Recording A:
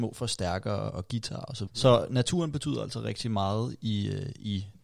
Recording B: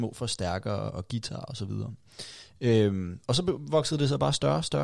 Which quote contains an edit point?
A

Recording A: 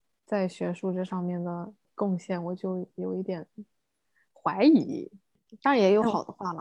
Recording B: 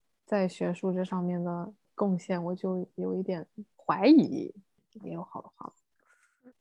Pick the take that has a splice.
B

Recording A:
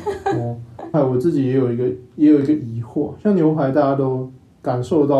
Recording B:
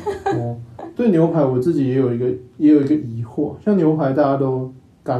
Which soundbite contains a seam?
A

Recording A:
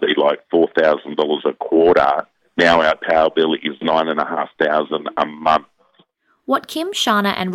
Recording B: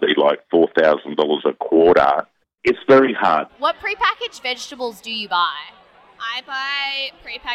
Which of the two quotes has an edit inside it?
B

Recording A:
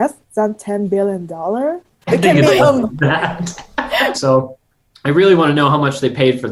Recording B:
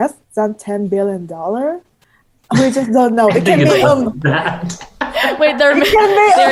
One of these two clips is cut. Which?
A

